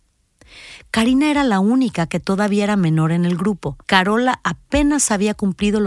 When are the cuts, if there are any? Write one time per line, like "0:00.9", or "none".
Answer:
0:03.8